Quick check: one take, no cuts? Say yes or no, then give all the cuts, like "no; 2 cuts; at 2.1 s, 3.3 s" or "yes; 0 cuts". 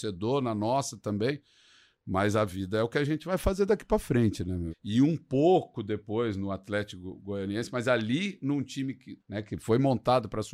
no; 2 cuts; at 4.7 s, 9.2 s